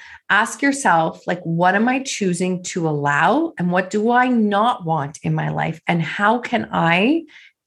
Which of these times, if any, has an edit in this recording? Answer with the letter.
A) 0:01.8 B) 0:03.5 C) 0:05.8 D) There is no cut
D